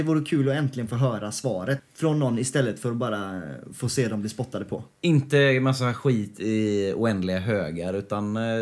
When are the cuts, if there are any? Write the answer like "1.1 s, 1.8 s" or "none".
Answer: 1.8 s